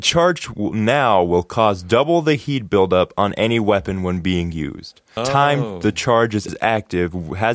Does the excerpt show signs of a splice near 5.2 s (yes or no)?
yes